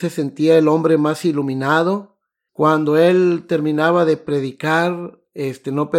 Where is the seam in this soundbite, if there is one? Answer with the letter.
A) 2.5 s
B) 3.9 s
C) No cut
A